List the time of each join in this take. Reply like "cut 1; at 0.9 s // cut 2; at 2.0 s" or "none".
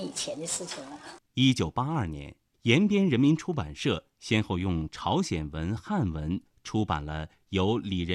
cut 1; at 1.2 s